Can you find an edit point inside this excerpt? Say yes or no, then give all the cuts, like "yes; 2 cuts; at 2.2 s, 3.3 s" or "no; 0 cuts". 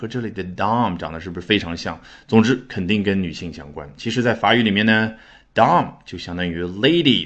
no; 0 cuts